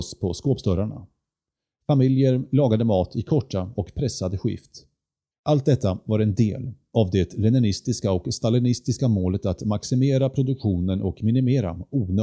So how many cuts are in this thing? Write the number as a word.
one